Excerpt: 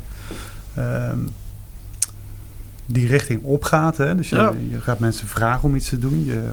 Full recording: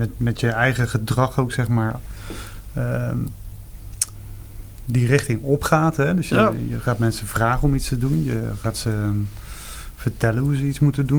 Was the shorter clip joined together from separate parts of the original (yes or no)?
no